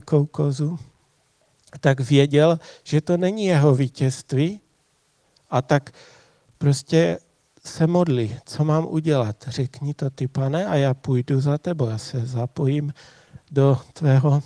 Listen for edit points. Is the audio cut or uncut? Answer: uncut